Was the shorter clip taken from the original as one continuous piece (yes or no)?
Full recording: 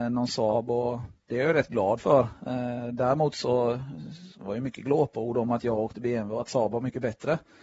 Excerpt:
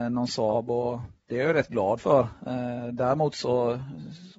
yes